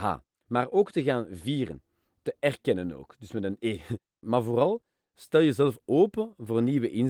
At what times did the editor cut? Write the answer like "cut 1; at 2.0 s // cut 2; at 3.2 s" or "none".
cut 1; at 4.2 s